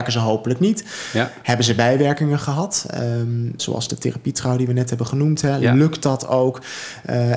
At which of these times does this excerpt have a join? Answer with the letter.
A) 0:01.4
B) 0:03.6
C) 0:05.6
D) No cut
B